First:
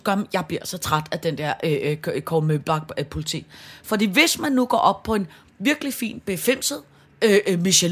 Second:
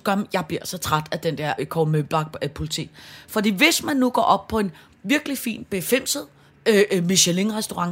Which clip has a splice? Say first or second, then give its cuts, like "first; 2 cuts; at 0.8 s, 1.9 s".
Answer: second; 1 cut; at 1.6 s